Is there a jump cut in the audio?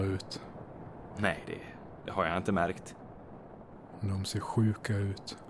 no; 0 cuts

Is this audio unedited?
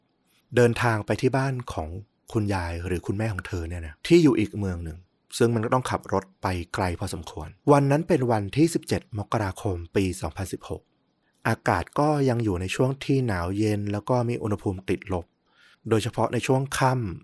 no; 2 cuts; at 4.0 s, 7.6 s

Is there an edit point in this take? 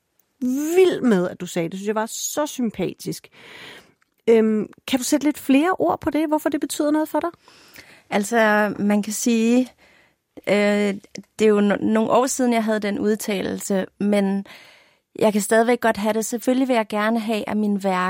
no; 0 cuts

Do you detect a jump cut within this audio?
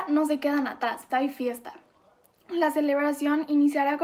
yes; 1 cut; at 1.1 s

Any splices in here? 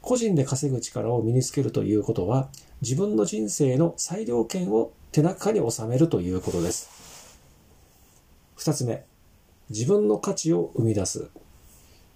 no; 0 cuts

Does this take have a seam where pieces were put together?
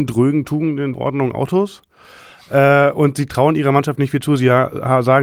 yes; 1 cut; at 0.9 s

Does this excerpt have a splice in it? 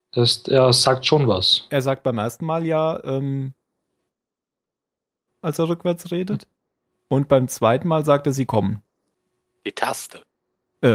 yes; 2 cuts; at 5.3 s, 7.0 s

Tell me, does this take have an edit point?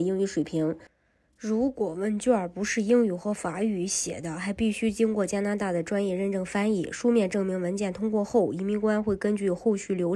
no; 0 cuts

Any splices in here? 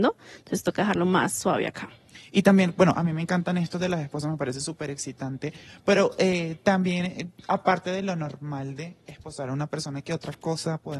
no; 0 cuts

